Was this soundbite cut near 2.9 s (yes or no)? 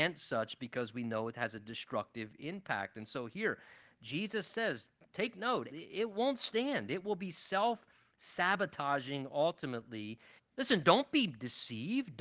no